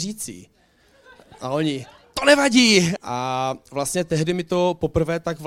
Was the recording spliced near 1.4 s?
no; 1 cut; at 3.0 s

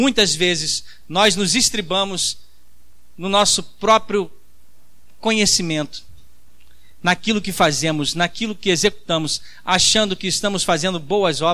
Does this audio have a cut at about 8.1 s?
no; 0 cuts

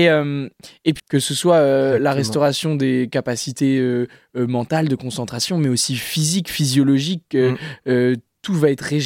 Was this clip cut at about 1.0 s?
yes; 1 cut; at 1.0 s

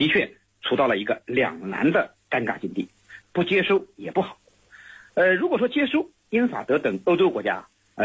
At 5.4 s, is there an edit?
no; 1 cut; at 3.2 s

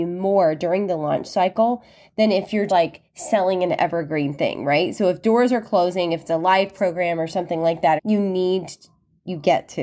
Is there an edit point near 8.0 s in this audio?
yes; 2 cuts; at 2.7 s, 8.0 s

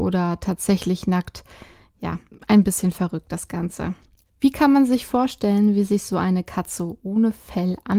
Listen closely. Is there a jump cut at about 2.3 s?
yes; 1 cut; at 2.3 s

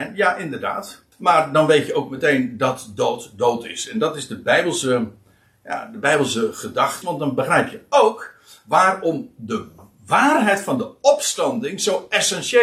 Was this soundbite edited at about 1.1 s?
yes; 2 cuts; at 1.1 s, 7.0 s

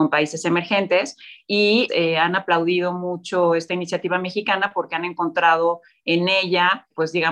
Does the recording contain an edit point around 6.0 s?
no; 1 cut; at 1.9 s

